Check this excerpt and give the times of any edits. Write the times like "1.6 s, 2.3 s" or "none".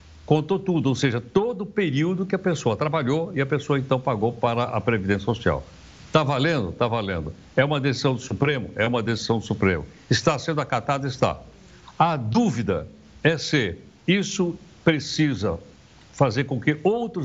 none